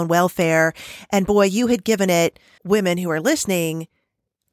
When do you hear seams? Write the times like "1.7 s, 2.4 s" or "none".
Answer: 2.6 s